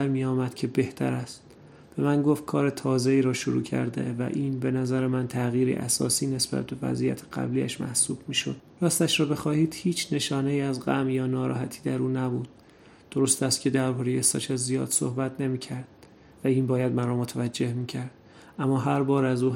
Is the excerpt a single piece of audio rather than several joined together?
no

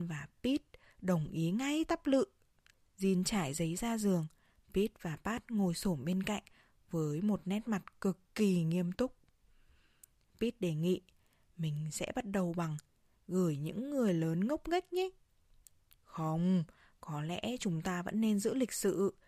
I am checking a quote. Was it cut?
no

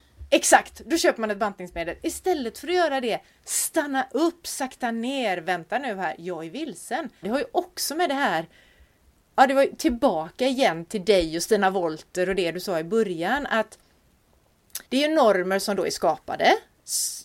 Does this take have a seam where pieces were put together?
yes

